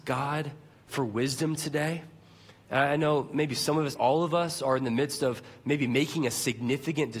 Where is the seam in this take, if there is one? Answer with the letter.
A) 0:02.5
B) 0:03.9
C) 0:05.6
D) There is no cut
B